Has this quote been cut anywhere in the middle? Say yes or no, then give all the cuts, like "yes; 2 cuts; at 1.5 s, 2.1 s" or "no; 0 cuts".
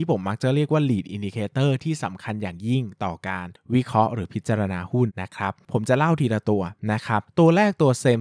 yes; 1 cut; at 5.1 s